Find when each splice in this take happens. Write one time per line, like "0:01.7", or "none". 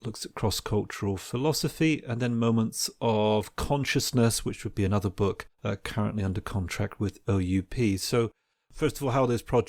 0:05.5

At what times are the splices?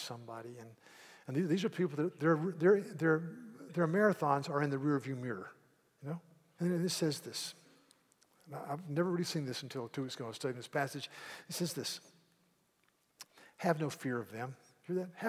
0:06.6

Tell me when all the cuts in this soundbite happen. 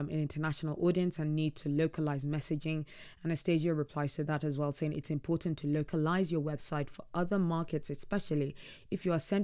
none

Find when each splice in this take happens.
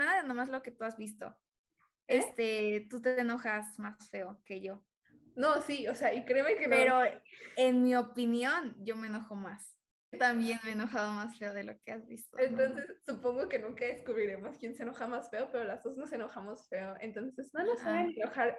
0:10.1

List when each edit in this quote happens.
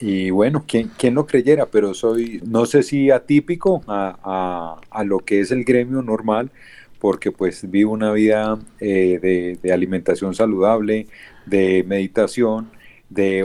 0:02.4

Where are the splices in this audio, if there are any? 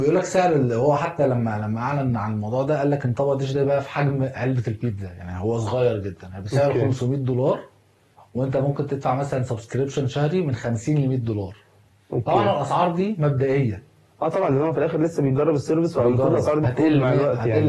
0:16.6

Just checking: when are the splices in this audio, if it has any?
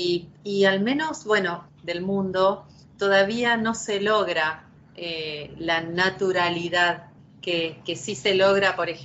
0:01.7

